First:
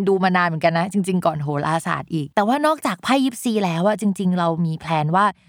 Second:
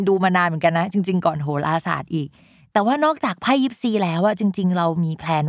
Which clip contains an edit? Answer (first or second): first